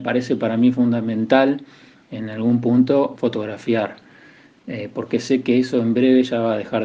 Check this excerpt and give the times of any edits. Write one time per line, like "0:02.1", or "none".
0:03.1

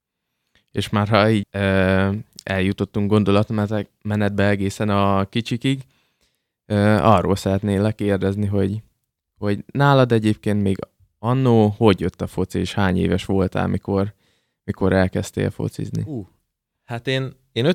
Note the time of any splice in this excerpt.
0:01.4

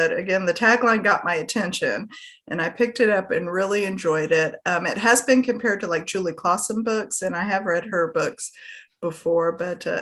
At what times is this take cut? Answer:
none

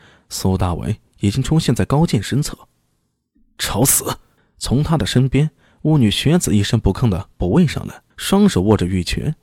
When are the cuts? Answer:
0:04.4
0:08.1

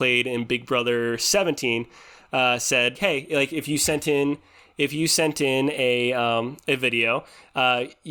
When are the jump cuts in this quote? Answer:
0:02.9

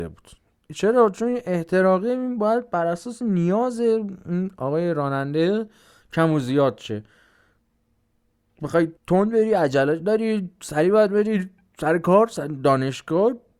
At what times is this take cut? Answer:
0:09.0

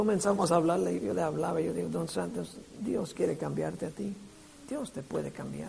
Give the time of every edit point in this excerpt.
0:01.0

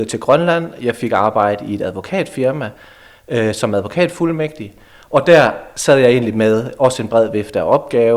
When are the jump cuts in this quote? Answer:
none

